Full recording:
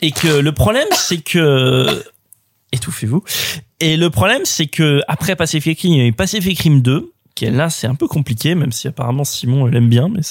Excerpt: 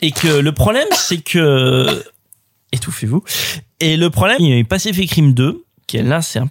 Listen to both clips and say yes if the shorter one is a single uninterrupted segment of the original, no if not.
no